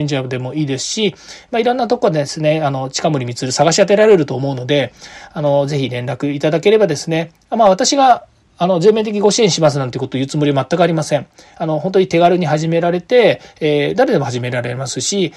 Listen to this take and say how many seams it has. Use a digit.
0